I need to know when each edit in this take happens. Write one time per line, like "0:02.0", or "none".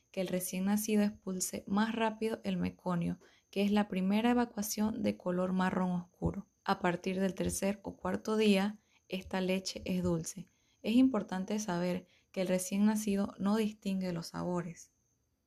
0:06.6

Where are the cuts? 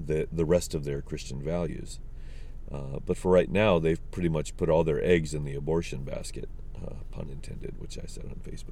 none

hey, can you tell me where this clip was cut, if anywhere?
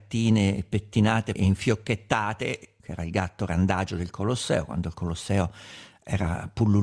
0:01.4
0:02.8

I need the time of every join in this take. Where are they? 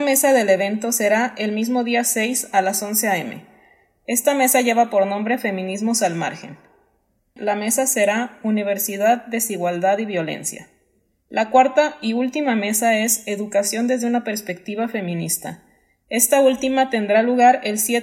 0:07.4

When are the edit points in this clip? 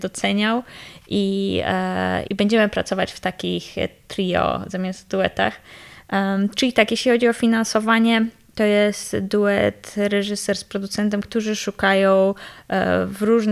0:02.3

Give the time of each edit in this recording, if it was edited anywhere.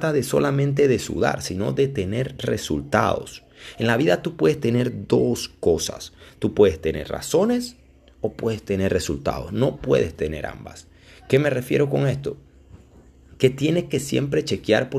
none

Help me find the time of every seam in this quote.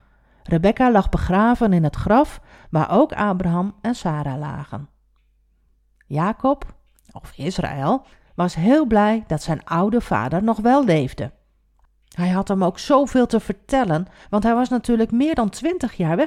none

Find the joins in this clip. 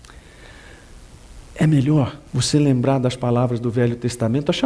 0:02.3

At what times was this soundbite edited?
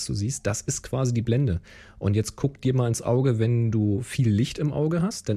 none

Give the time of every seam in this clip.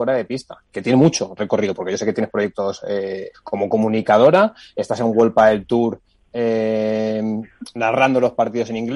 0:03.3

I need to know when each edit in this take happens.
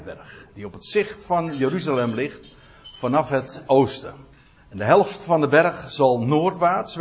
0:04.6

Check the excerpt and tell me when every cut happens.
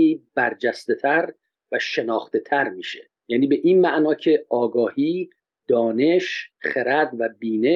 0:03.2

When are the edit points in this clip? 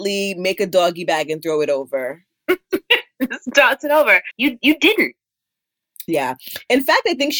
0:04.3

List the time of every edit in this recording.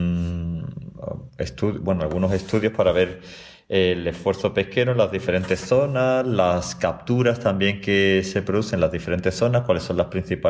none

